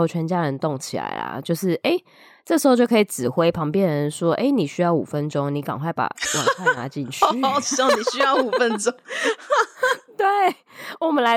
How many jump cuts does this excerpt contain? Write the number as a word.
zero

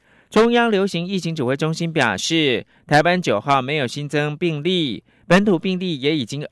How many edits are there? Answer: zero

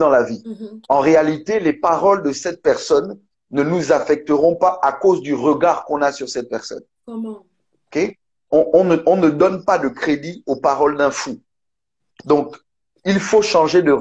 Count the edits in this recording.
one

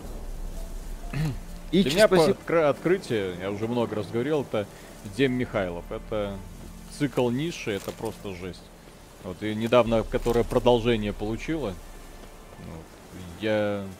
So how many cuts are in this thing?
one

